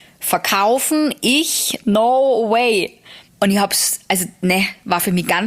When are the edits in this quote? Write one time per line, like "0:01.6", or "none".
0:03.3